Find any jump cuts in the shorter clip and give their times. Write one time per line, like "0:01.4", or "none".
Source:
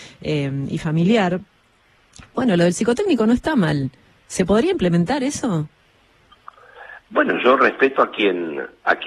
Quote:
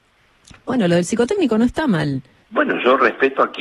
0:02.4